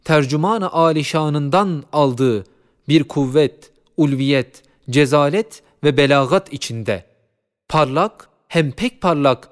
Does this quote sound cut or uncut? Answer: uncut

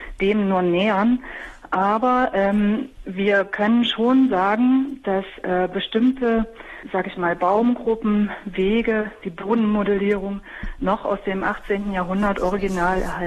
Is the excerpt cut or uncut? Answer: uncut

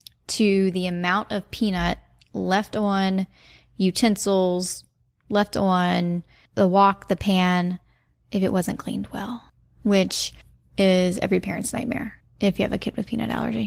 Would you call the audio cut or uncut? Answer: uncut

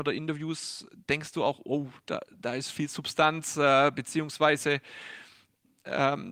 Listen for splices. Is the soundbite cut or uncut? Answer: uncut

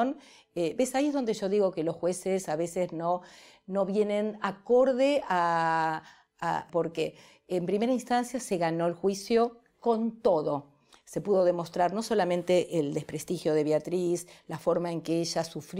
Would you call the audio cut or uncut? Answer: cut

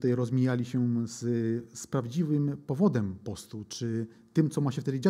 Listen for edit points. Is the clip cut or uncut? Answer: uncut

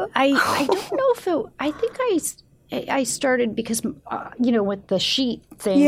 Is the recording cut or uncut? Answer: uncut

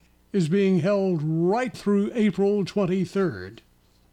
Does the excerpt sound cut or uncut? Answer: cut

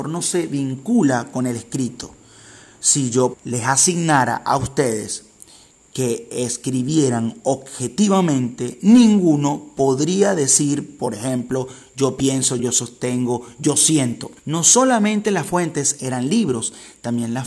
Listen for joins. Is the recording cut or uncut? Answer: cut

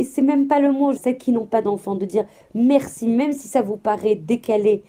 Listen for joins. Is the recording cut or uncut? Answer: cut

